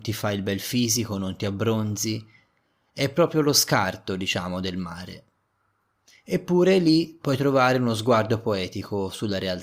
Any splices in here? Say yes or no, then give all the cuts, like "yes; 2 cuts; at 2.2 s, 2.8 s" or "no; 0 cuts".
no; 0 cuts